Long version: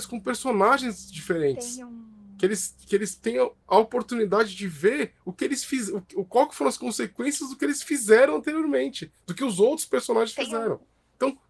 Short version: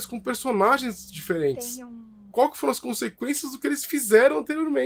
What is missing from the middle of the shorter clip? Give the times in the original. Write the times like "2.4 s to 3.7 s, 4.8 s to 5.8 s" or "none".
2.3 s to 6.3 s